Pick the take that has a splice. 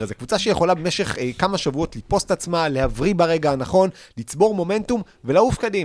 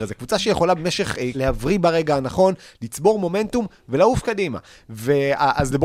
second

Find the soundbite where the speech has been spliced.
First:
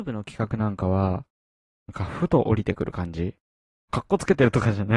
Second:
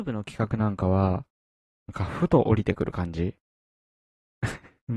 first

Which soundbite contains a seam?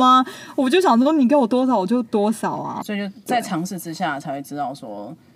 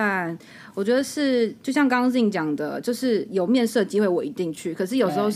first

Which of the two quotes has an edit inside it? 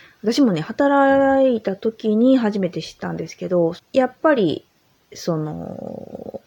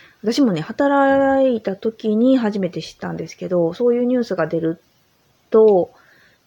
first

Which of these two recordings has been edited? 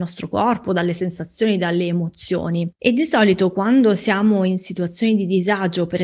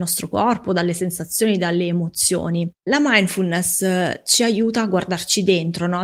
second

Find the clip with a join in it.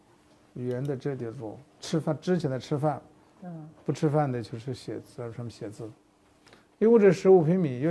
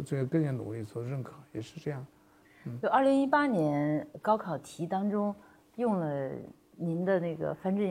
second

